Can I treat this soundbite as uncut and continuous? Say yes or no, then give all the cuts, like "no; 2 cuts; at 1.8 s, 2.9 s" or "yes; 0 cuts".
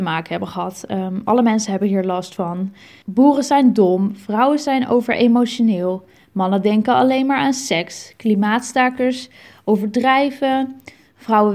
yes; 0 cuts